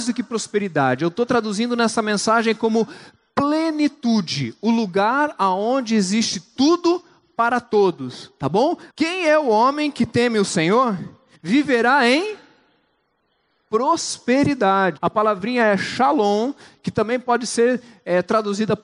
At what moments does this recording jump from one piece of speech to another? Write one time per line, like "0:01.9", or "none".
0:08.9
0:11.3
0:15.0